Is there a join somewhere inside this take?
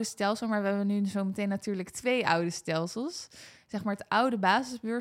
no; 0 cuts

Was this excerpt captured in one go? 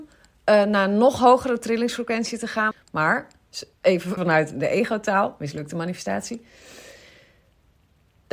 no; 2 cuts; at 2.7 s, 4.2 s

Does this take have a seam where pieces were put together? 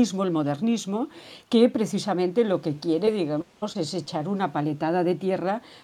no; 0 cuts

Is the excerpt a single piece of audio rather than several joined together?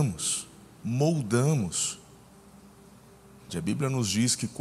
no; 1 cut; at 3.5 s

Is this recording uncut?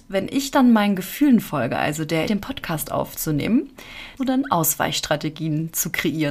no; 2 cuts; at 2.3 s, 4.2 s

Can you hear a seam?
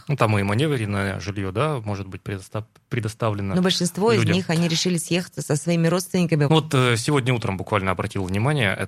yes; 1 cut; at 6.5 s

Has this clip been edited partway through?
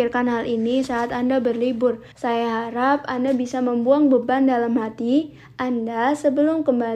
yes; 1 cut; at 2.1 s

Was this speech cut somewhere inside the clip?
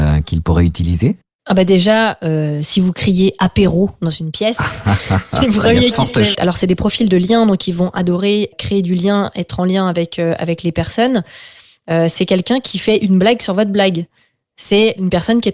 yes; 2 cuts; at 6.3 s, 8.5 s

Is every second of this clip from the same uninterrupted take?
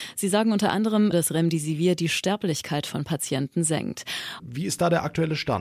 no; 2 cuts; at 1.1 s, 4.4 s

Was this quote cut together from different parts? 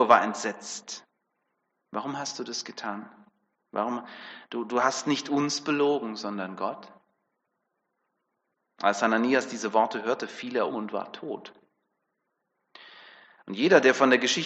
yes; 2 cuts; at 1.7 s, 10.7 s

